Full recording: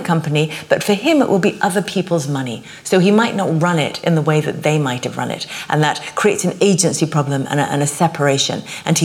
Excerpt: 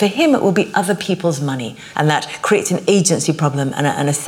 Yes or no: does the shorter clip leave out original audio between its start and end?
yes